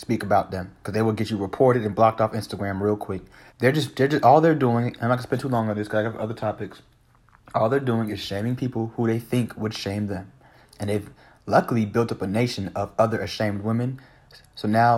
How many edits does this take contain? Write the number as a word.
two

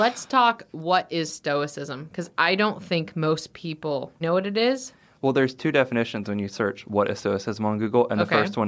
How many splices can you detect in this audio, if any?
one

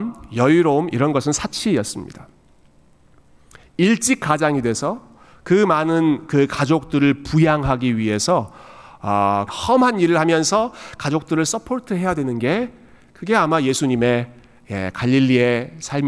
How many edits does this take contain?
one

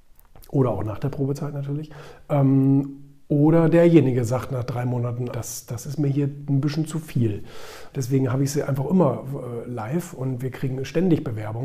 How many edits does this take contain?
two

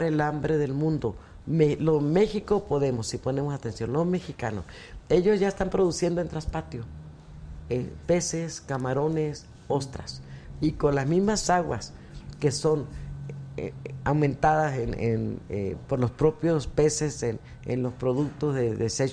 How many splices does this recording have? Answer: zero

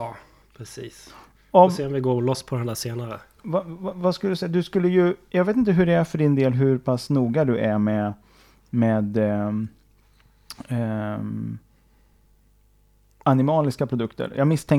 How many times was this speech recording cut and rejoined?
zero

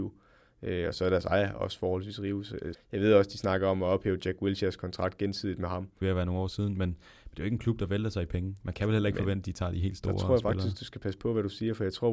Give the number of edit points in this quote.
two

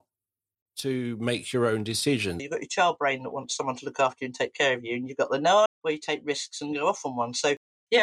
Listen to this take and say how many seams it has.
two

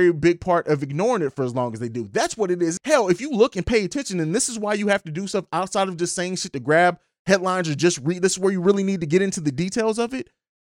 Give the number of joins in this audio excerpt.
one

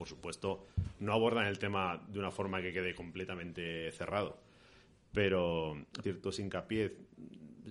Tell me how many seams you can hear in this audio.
one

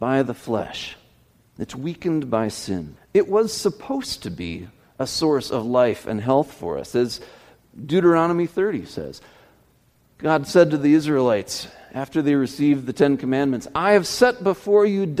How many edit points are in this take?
one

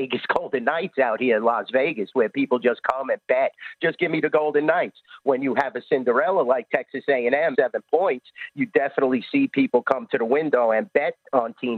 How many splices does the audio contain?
one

